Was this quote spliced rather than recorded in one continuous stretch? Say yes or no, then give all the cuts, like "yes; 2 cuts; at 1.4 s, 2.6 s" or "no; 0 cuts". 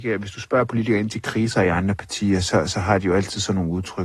no; 0 cuts